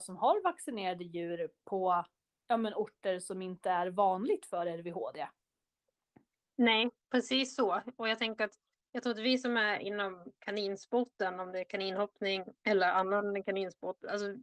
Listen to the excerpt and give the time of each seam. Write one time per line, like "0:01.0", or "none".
0:07.0
0:12.6